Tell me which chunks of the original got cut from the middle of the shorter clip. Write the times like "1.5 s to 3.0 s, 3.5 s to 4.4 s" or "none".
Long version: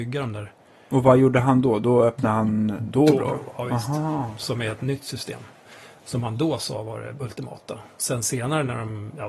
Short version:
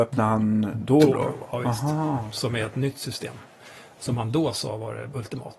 none